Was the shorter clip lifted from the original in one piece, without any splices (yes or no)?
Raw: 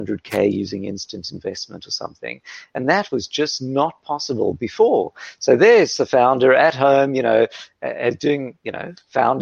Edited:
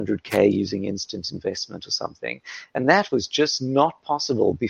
yes